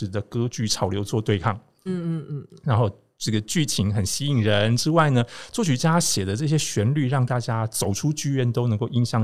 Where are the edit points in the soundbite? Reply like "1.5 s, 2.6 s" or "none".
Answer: 1.9 s